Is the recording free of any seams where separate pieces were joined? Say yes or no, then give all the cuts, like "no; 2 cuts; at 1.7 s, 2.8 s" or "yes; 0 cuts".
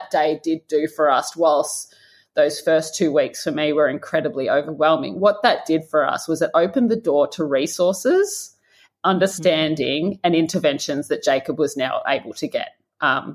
yes; 0 cuts